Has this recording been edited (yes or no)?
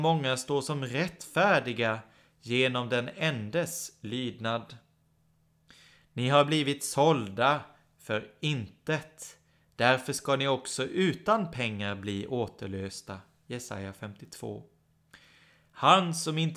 no